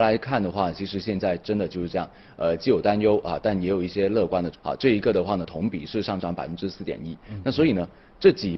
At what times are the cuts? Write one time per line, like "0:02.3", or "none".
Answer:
0:04.5
0:07.2